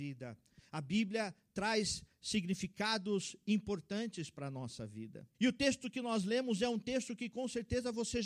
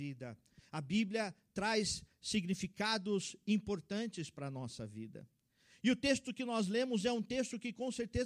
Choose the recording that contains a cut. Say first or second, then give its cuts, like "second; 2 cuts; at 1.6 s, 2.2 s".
first; 1 cut; at 5.3 s